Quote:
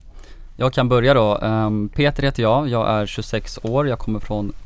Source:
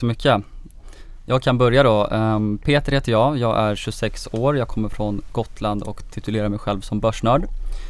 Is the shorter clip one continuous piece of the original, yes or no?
yes